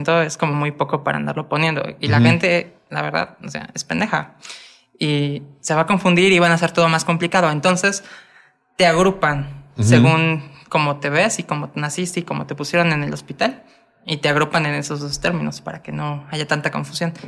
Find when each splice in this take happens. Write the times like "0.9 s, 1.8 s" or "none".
none